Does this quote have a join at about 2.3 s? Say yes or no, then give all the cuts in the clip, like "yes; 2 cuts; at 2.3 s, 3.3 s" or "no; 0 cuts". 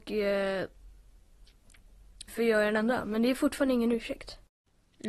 yes; 1 cut; at 2.3 s